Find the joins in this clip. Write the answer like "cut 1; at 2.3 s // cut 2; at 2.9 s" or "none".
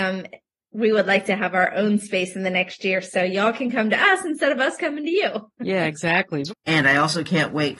cut 1; at 6.5 s